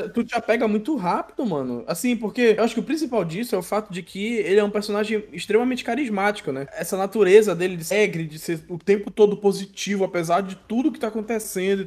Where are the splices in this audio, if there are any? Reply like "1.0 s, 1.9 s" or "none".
none